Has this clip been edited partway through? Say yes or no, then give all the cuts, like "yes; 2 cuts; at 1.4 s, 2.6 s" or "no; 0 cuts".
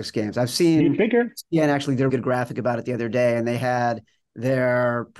yes; 1 cut; at 2.1 s